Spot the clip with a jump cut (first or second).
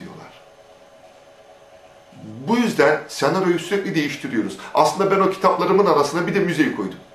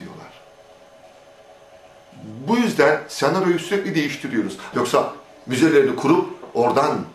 second